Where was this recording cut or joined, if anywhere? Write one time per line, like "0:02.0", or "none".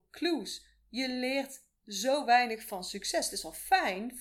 none